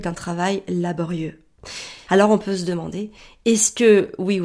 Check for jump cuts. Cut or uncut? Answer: cut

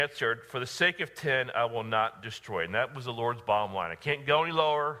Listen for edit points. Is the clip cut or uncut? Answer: uncut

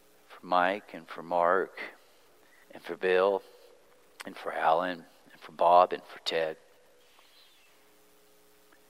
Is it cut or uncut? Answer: cut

